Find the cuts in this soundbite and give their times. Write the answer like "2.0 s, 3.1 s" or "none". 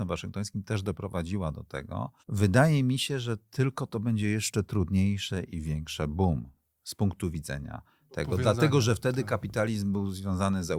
2.2 s